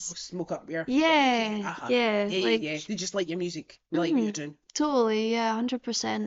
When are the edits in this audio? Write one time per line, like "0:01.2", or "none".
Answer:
none